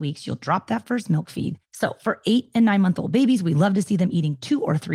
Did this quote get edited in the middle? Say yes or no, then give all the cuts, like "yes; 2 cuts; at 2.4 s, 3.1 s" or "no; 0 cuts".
yes; 1 cut; at 1.6 s